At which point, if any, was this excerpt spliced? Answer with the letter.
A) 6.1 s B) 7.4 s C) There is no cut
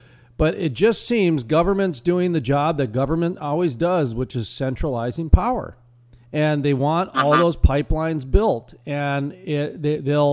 C